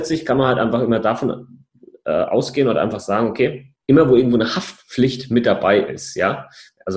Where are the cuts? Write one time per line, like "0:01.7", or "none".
0:03.8